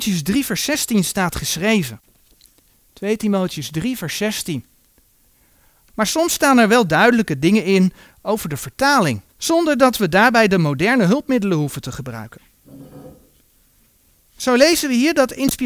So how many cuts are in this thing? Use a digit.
2